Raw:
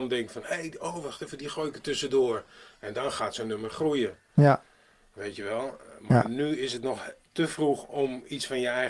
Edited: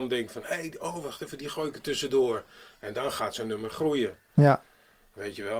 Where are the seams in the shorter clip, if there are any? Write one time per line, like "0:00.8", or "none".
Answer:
none